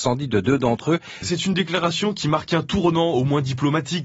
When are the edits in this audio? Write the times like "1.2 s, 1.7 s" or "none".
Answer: 1.2 s

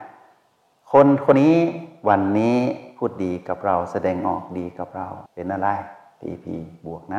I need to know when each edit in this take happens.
1.3 s, 5.3 s

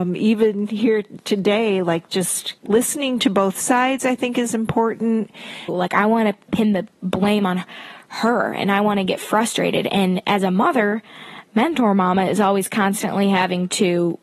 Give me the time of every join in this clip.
2.6 s, 5.7 s

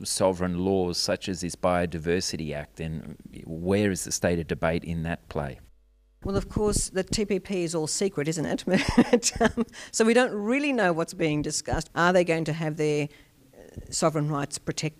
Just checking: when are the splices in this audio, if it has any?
11.9 s

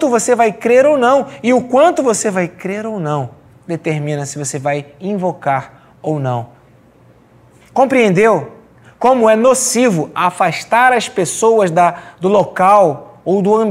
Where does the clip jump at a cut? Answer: 7.6 s

